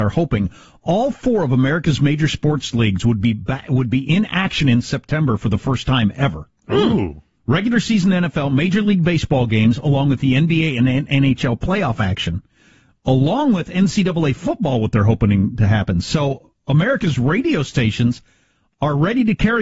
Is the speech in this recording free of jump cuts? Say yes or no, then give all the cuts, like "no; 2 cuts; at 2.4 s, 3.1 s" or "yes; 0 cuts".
yes; 0 cuts